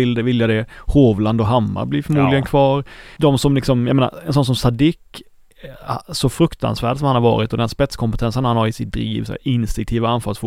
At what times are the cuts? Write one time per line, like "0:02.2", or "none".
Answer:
0:03.2
0:09.3